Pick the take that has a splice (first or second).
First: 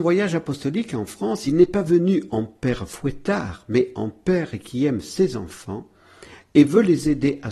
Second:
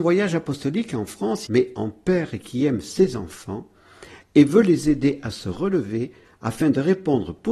second